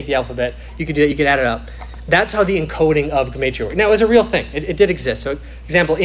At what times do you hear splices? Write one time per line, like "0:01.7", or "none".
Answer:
none